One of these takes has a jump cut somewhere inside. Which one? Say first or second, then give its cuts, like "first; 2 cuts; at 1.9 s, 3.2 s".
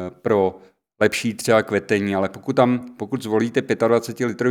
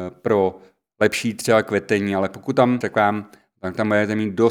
second; 1 cut; at 2.8 s